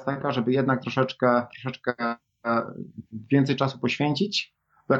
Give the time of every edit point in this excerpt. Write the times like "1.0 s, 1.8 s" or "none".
none